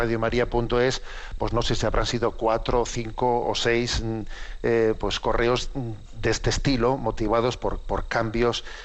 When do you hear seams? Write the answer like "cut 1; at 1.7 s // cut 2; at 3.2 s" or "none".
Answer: none